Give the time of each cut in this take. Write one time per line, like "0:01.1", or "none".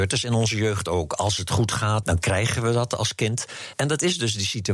0:02.0
0:03.7